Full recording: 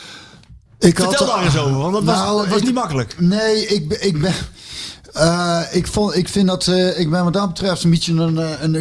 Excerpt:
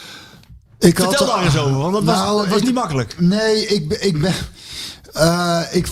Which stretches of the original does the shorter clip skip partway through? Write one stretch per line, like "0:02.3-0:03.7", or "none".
none